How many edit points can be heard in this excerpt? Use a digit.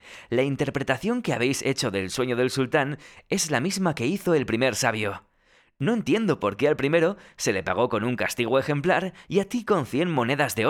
0